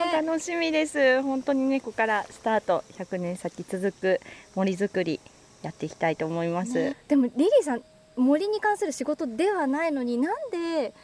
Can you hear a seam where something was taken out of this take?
yes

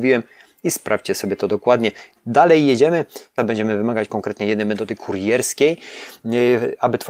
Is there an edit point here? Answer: yes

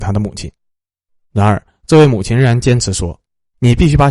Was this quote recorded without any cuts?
yes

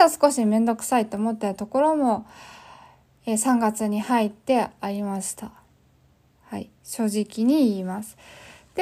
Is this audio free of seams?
yes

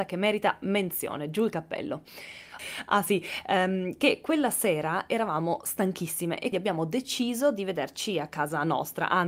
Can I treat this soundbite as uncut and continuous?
no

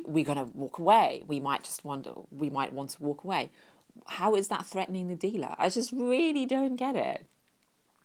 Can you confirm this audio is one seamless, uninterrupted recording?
yes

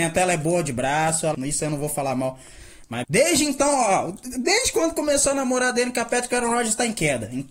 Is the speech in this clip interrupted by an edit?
yes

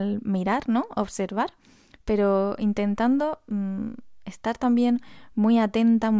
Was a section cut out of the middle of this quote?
no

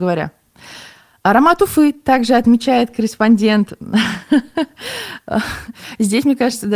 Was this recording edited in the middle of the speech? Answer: no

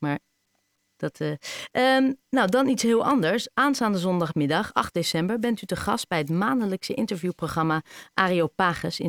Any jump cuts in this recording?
no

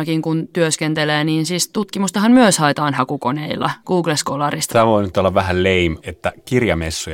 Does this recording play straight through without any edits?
no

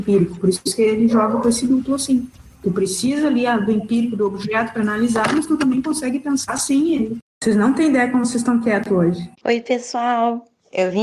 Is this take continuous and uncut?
no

